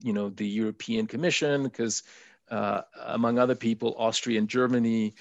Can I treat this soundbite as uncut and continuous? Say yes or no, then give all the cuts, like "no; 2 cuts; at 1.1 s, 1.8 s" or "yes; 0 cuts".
yes; 0 cuts